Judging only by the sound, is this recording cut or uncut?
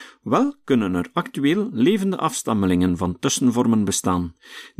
uncut